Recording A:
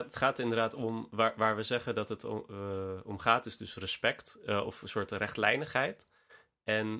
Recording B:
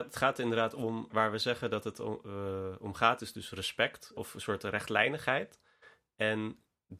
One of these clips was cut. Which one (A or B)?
B